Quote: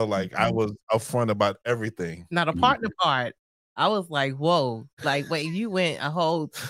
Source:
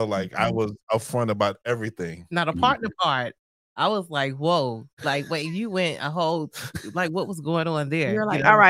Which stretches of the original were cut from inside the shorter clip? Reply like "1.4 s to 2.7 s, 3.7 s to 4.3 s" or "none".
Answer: none